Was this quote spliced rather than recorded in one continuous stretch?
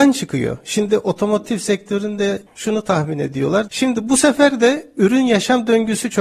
yes; 1 cut; at 3.7 s

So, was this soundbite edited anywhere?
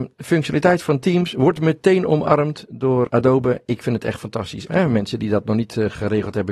yes; 2 cuts; at 3.1 s, 4.7 s

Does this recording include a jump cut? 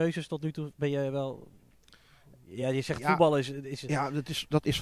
no; 0 cuts

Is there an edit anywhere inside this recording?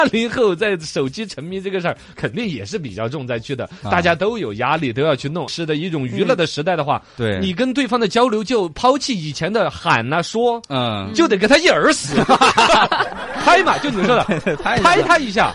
yes; 1 cut; at 5.5 s

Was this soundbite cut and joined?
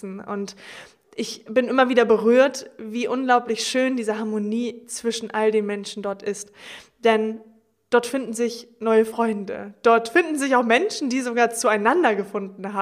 no; 0 cuts

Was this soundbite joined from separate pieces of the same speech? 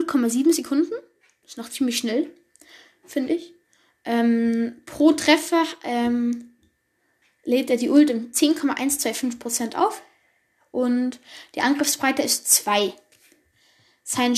no; 0 cuts

